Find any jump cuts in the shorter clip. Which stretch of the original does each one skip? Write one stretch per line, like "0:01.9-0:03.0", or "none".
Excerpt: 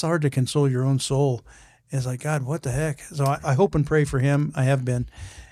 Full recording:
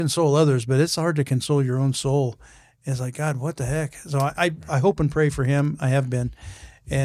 0:04.3-0:04.6